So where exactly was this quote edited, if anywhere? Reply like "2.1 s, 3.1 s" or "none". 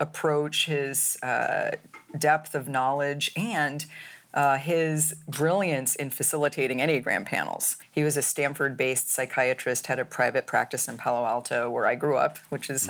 7.8 s